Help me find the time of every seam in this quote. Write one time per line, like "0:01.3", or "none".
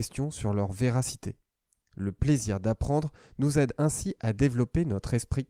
none